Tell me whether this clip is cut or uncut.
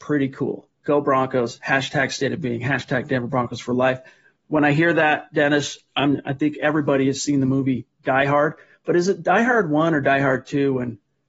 uncut